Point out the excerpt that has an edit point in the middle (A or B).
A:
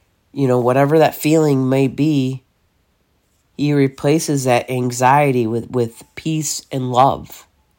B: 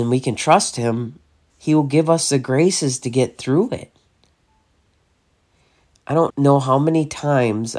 B